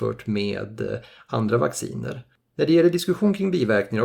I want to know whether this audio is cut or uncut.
cut